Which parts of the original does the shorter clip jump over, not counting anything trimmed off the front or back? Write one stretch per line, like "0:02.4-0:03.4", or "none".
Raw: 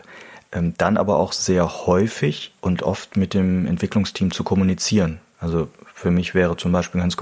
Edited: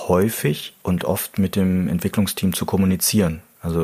none

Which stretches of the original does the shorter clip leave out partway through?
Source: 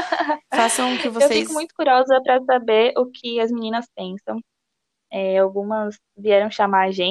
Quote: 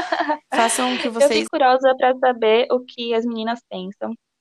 0:01.5-0:01.7

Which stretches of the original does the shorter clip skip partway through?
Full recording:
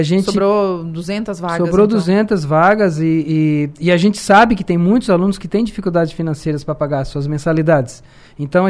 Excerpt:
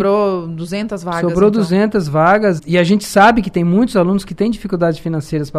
0:02.9-0:03.7

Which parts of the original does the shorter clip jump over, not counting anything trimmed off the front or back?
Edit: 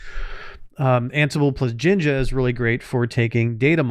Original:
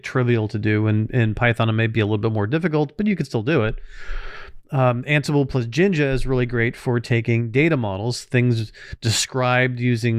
none

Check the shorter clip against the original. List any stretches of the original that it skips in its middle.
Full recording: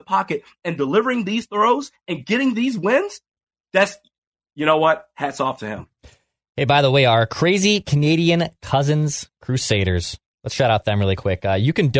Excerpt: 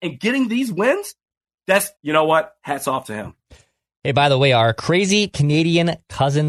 0:04.0-0:04.5

